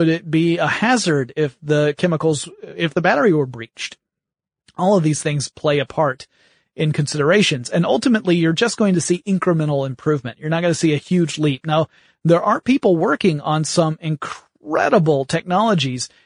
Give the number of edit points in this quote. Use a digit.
0